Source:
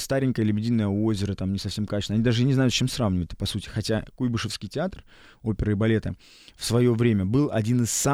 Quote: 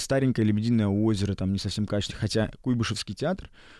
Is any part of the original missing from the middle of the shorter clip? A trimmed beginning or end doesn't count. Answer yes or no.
yes